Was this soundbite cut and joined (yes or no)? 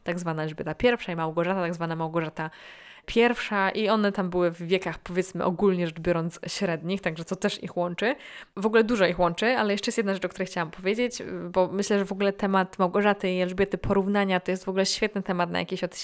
no